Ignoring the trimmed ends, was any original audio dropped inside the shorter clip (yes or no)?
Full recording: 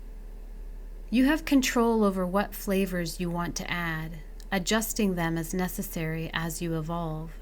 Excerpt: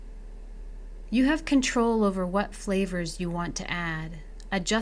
no